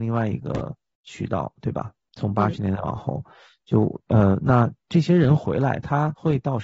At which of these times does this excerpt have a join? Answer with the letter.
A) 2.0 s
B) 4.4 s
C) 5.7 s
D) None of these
D